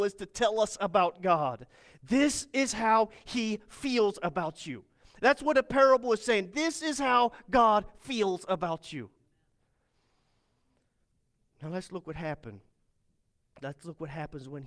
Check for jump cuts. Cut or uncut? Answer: uncut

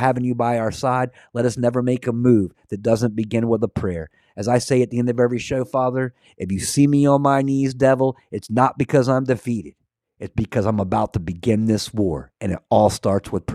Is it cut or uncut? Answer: uncut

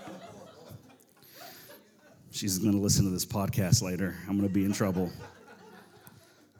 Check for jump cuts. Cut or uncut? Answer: uncut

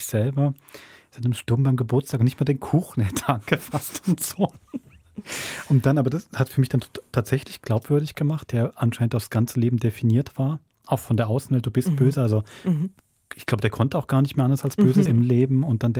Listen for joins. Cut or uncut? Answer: cut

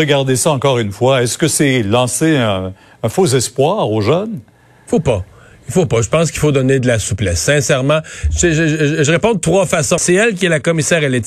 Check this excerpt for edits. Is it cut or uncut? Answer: cut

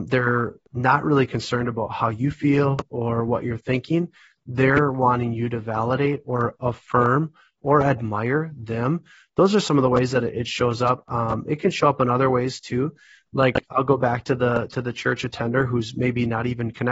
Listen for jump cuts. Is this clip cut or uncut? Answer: uncut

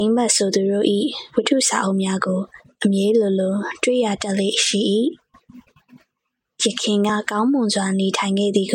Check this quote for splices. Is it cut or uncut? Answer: uncut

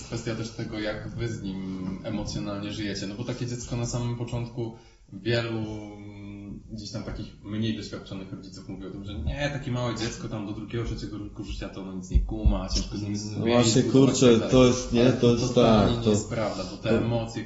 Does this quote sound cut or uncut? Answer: uncut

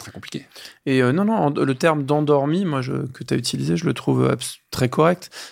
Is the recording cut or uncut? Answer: uncut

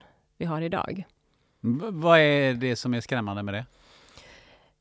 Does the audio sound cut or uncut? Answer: uncut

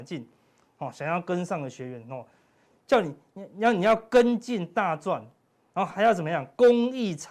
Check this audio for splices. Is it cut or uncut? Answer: cut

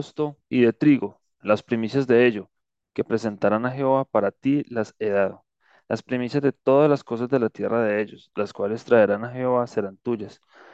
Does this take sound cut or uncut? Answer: cut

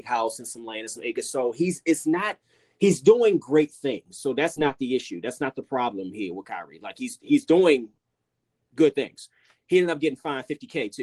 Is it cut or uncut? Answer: uncut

